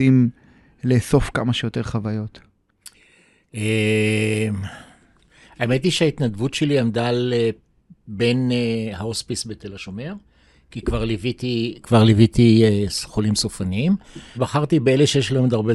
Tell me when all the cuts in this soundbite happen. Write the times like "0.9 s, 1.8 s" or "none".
14.3 s